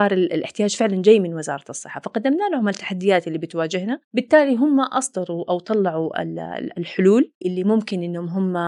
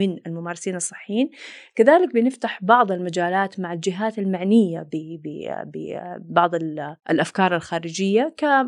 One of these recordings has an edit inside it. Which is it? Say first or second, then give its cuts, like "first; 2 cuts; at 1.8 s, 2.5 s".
first; 1 cut; at 7.4 s